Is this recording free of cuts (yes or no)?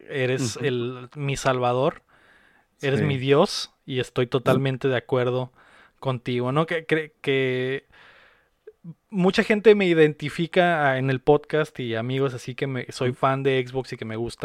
yes